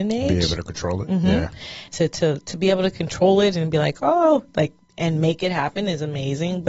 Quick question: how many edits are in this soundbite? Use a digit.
1